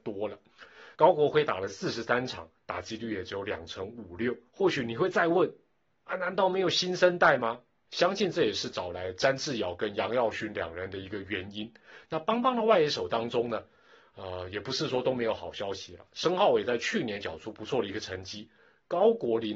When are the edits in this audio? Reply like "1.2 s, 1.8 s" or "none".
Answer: 0.9 s, 4.5 s, 7.9 s